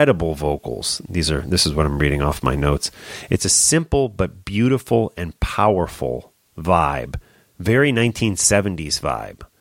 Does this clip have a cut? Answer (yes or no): no